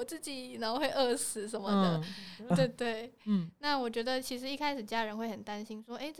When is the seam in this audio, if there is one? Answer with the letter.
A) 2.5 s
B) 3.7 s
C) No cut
A